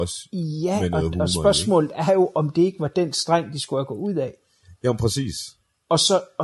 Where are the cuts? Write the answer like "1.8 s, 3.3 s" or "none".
none